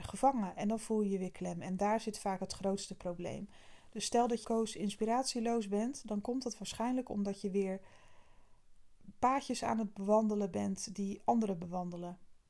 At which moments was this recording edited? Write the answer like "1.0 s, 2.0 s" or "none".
4.4 s